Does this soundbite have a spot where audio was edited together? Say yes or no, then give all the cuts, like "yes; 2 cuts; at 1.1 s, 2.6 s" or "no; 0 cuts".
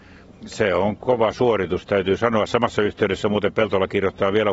no; 0 cuts